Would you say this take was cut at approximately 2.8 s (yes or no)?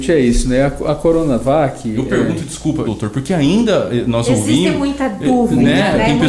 yes